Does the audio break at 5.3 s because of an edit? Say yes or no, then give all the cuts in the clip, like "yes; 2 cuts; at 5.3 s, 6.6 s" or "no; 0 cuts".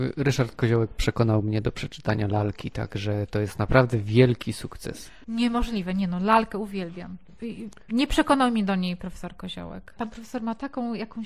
no; 1 cut; at 10.0 s